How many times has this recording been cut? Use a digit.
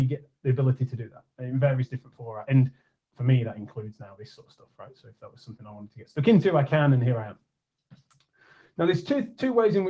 0